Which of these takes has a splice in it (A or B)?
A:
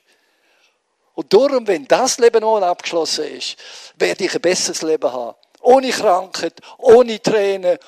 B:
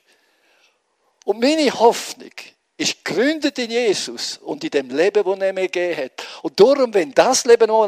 A